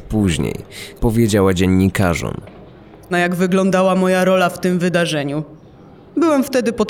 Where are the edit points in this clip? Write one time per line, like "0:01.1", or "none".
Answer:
0:01.0
0:03.1